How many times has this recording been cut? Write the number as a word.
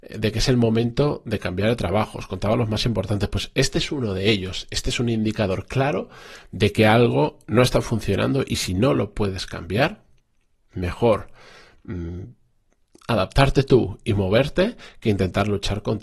zero